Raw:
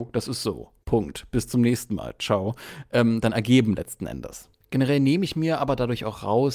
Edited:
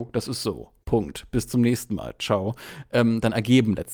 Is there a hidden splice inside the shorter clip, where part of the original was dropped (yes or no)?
no